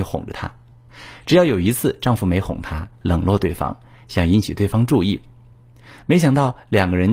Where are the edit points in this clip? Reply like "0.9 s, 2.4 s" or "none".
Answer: 2.9 s